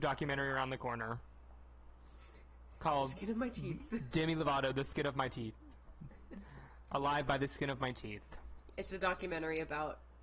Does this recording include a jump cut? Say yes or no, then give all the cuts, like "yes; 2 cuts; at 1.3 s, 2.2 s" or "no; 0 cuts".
no; 0 cuts